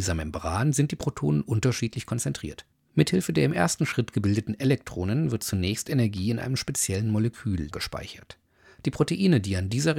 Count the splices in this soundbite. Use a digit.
2